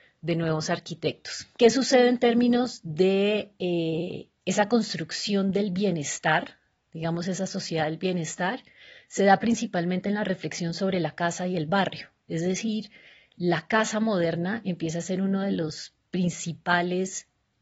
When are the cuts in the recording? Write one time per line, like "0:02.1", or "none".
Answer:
0:01.5